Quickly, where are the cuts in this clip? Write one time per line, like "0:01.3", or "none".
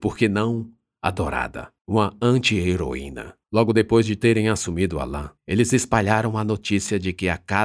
0:01.8
0:03.4
0:05.4